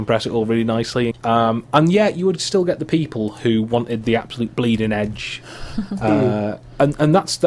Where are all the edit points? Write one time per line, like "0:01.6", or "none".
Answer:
0:01.1